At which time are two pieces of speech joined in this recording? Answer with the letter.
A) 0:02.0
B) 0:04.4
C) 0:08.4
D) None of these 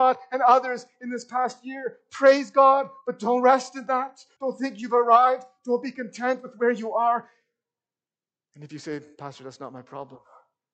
B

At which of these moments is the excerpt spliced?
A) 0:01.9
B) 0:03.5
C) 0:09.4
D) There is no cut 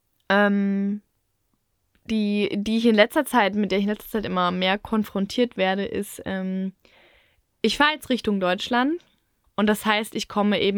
C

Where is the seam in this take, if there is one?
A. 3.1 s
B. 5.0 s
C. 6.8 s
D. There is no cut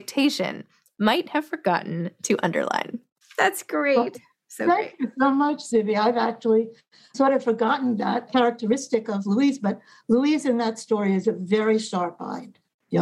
D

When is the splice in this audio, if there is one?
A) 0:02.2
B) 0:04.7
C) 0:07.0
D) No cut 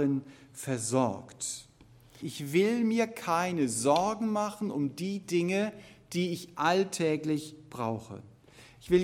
A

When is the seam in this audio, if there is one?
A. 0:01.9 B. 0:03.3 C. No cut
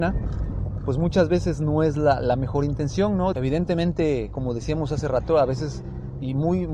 B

